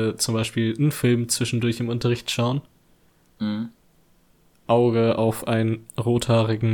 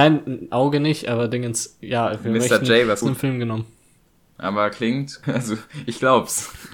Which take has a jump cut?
second; 2 cuts; at 3.0 s, 5.2 s

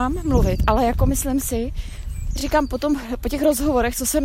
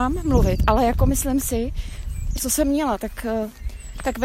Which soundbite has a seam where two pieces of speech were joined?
second; 1 cut; at 2.4 s

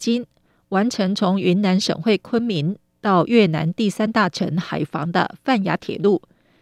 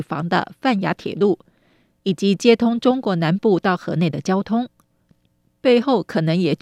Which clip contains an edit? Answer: second; 1 cut; at 5.1 s

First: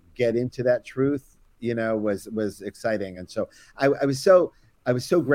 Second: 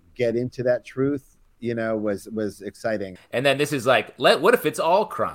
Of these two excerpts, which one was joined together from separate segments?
second; 1 cut; at 3.2 s

